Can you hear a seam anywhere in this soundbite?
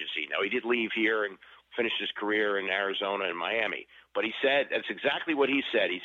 no; 0 cuts

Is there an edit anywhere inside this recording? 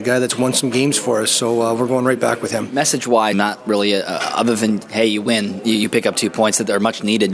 yes; 1 cut; at 3.3 s

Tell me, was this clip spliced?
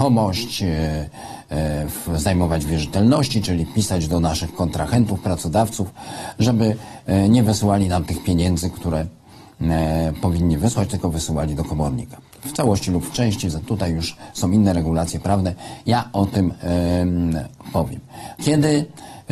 yes; 1 cut; at 18.4 s

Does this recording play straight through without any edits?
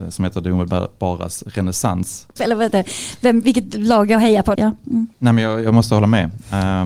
no; 2 cuts; at 2.4 s, 4.5 s

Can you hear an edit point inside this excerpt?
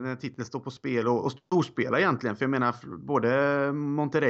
no; 0 cuts

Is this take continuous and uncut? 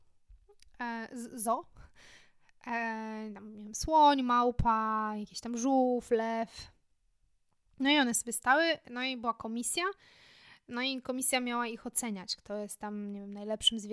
yes; 0 cuts

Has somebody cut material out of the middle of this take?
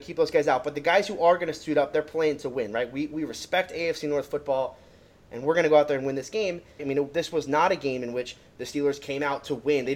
yes; 1 cut; at 6.8 s

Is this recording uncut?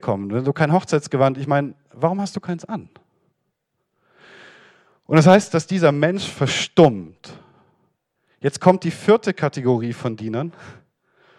yes; 0 cuts

